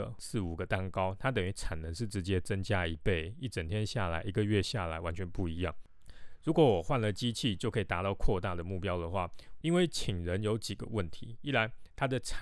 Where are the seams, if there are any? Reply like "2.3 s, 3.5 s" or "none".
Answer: 9.6 s